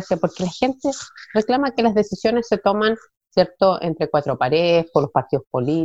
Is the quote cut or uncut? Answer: uncut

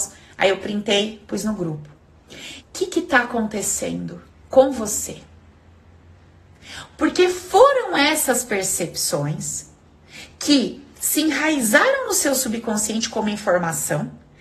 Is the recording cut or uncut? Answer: cut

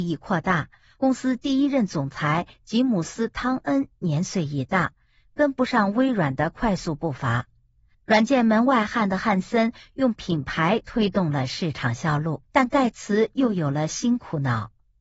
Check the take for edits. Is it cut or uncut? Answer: cut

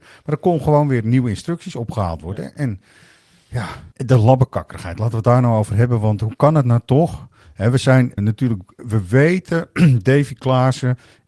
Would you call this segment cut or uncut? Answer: cut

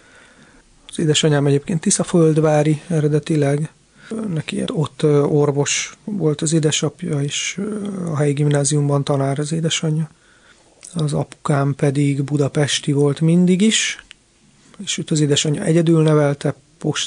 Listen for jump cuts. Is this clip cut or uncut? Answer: cut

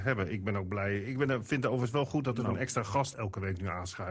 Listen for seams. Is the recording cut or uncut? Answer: cut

